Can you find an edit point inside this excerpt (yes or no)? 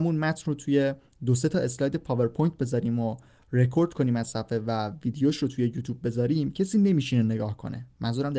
no